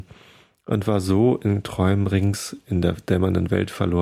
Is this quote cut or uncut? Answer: uncut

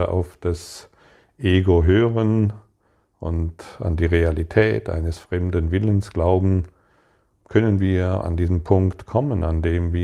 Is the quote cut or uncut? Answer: uncut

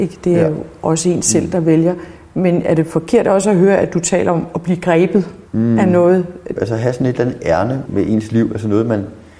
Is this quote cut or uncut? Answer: cut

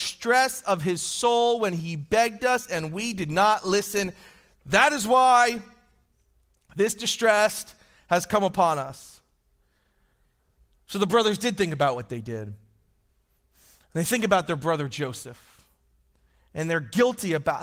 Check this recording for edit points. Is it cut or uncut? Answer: uncut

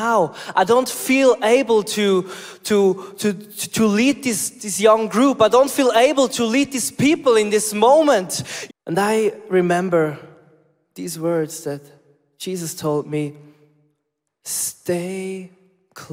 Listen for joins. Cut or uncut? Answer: cut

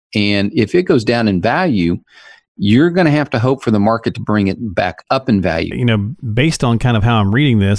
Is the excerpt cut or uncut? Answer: cut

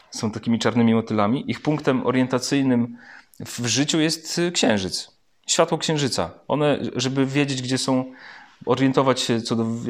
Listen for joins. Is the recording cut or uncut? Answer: uncut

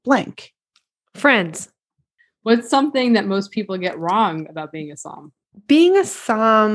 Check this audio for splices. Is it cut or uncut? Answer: uncut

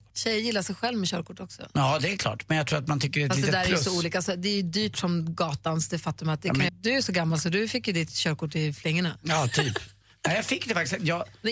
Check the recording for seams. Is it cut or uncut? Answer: cut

